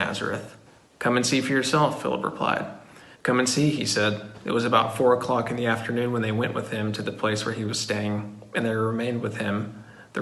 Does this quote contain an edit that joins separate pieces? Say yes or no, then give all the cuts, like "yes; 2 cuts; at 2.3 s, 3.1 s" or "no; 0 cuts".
yes; 1 cut; at 3.1 s